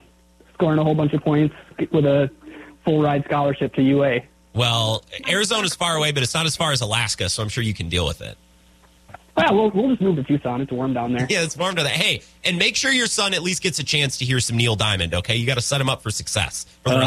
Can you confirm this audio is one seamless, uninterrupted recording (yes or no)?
yes